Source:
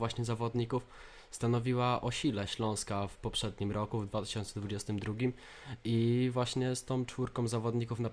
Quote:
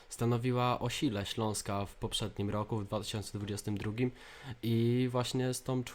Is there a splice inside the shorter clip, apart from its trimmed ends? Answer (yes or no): no